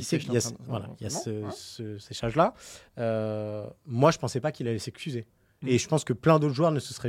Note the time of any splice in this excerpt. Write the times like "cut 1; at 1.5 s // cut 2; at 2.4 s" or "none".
none